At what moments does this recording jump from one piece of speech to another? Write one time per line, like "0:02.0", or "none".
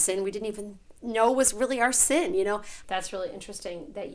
0:02.8